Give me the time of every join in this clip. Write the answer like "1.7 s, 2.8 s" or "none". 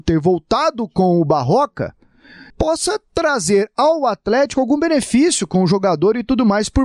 2.5 s